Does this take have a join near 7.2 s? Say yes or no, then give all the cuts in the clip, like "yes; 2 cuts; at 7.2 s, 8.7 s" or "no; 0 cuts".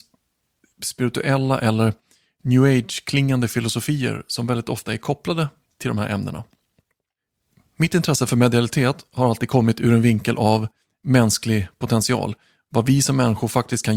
no; 0 cuts